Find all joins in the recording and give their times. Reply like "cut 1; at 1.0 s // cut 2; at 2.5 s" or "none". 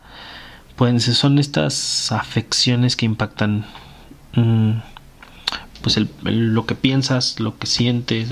none